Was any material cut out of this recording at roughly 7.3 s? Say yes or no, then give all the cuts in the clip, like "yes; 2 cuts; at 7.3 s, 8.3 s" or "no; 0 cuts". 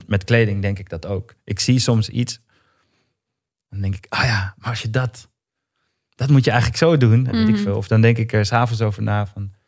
yes; 1 cut; at 7.3 s